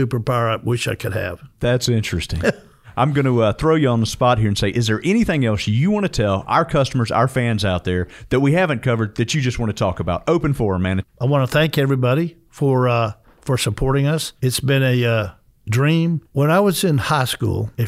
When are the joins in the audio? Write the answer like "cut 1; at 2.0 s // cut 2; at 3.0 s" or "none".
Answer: cut 1; at 11.0 s